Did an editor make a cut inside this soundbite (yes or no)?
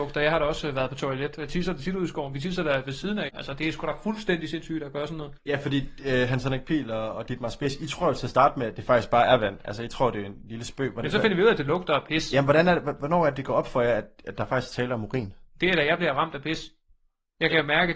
yes